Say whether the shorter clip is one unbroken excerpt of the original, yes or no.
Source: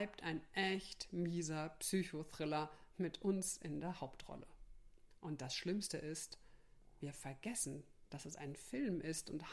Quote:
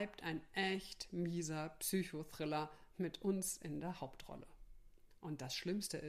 yes